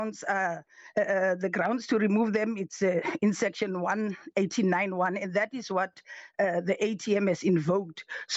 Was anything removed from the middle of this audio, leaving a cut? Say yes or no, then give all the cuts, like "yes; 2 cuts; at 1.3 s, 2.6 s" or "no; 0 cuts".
no; 0 cuts